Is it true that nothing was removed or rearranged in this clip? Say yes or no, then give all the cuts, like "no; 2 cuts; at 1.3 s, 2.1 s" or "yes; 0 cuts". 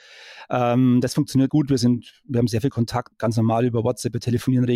no; 2 cuts; at 1.5 s, 3.1 s